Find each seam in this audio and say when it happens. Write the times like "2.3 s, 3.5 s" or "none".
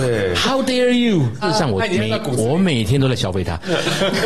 1.4 s